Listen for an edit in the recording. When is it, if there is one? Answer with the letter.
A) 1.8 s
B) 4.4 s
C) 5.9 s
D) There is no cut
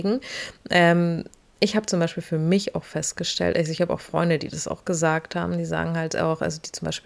D